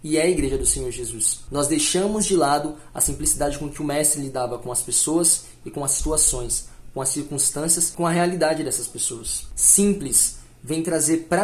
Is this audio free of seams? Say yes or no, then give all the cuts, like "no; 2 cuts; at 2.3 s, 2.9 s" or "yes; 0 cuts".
yes; 0 cuts